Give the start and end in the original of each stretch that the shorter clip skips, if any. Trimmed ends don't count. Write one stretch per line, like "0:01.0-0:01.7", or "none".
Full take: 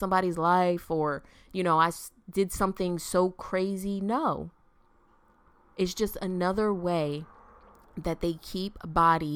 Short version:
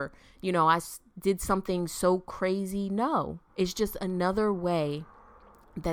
0:04.6-0:05.7